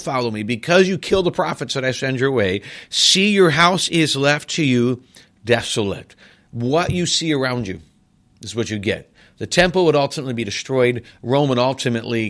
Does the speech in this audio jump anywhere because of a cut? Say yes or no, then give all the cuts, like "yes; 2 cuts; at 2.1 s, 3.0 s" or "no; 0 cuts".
no; 0 cuts